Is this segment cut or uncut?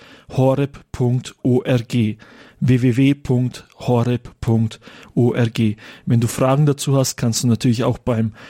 uncut